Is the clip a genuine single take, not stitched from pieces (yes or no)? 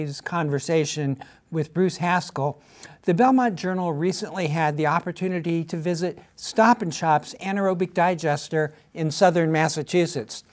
yes